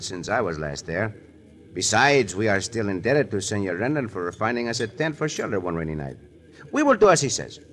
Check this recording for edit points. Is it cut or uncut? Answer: uncut